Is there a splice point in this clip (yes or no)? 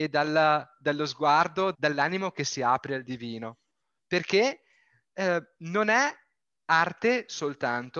yes